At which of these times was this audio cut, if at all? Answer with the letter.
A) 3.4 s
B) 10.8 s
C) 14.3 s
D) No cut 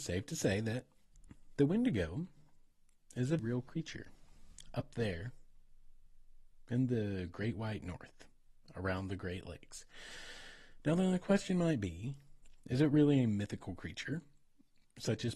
A